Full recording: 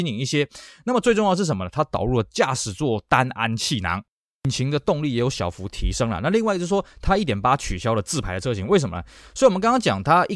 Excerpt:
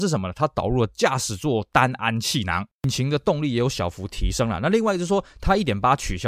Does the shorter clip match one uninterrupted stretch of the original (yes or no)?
no